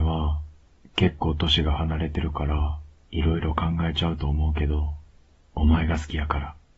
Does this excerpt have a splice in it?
yes; 1 cut; at 5.4 s

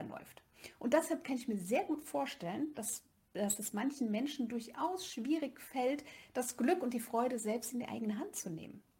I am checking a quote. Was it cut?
no; 0 cuts

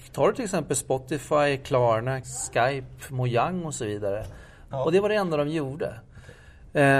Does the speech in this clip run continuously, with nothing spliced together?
no; 2 cuts; at 2.2 s, 4.7 s

